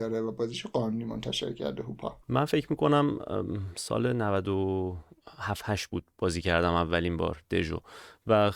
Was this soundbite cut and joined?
yes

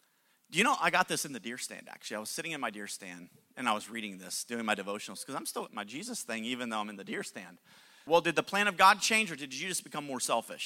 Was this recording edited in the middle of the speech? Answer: yes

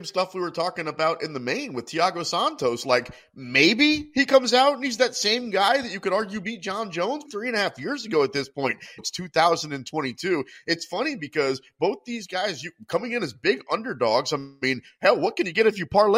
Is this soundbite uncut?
no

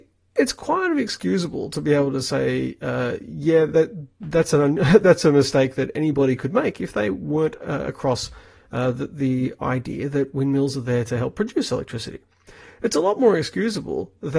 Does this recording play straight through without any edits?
yes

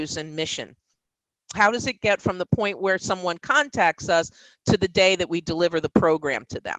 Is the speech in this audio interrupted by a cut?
yes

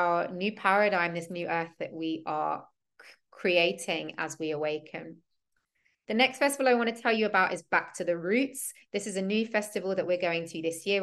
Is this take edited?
no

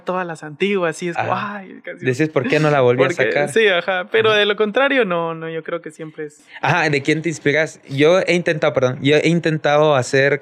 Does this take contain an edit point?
no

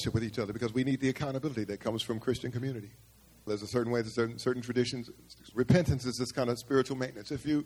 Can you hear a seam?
yes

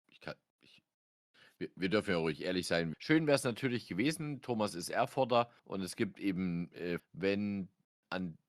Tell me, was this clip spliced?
yes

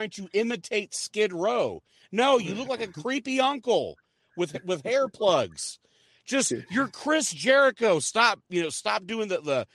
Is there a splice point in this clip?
no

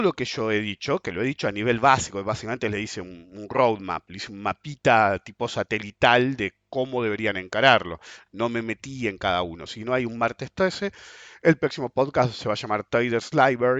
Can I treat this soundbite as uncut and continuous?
yes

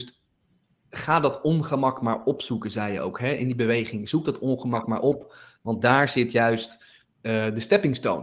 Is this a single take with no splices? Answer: yes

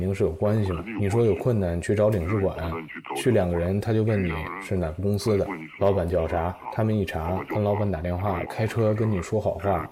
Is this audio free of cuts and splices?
no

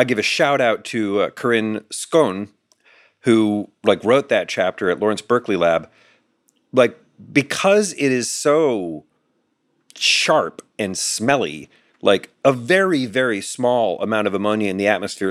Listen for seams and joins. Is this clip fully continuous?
no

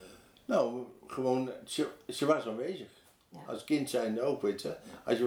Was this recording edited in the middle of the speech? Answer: no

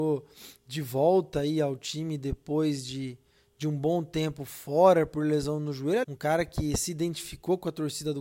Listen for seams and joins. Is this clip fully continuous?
no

